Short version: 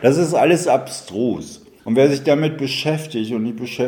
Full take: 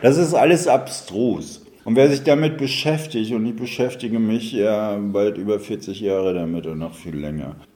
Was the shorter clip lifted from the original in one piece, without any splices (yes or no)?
yes